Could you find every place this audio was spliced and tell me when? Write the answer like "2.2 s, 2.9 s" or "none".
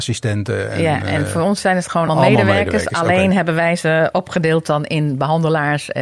2.1 s